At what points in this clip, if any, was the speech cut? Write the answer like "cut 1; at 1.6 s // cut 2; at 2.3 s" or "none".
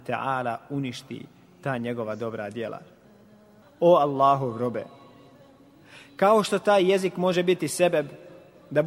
cut 1; at 3.6 s